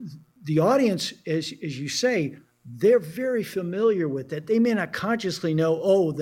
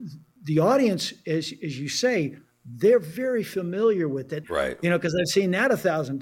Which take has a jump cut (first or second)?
second